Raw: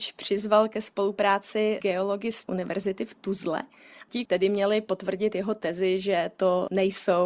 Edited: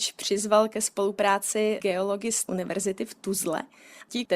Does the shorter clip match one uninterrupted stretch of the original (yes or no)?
yes